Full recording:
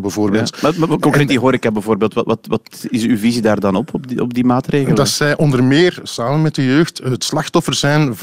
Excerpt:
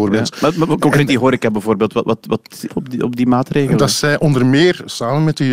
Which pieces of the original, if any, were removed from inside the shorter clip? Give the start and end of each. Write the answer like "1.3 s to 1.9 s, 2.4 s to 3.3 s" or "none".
2.9 s to 3.9 s

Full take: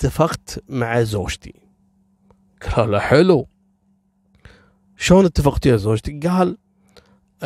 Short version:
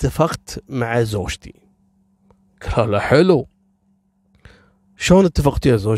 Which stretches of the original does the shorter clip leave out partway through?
none

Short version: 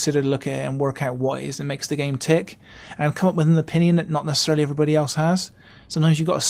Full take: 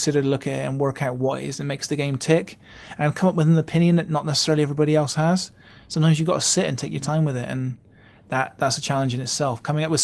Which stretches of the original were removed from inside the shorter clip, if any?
none

